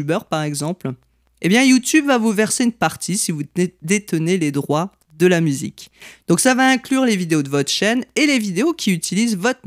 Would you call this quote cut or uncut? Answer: uncut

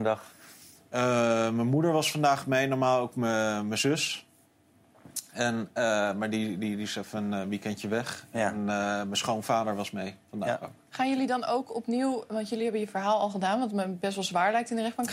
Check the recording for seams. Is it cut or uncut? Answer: uncut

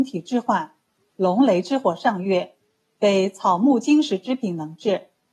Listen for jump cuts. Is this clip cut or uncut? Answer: cut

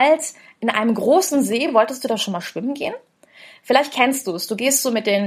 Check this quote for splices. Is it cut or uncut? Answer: uncut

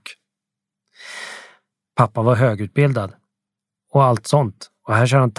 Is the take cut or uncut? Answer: uncut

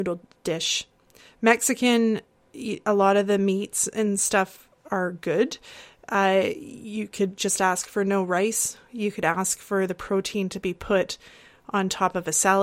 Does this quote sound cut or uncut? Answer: uncut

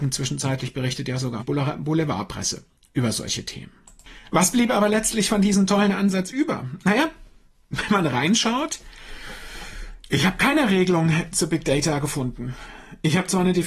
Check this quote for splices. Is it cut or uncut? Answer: cut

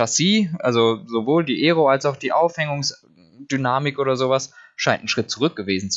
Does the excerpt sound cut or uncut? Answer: uncut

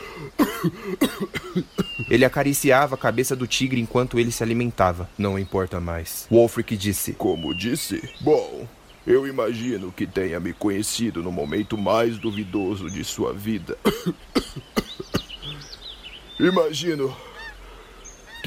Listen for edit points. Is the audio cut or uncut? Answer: cut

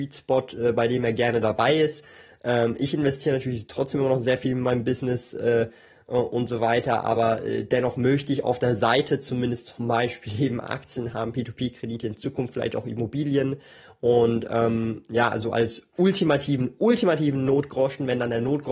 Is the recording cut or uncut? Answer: uncut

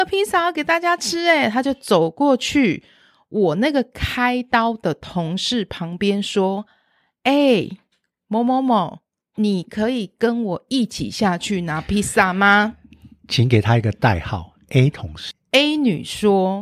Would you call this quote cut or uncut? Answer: cut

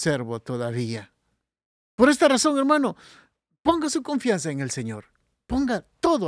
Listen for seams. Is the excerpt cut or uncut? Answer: uncut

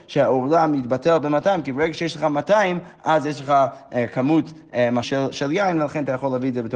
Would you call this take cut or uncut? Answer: cut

